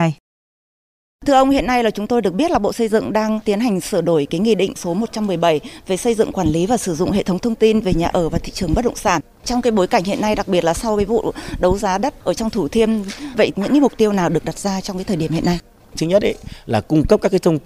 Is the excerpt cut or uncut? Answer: cut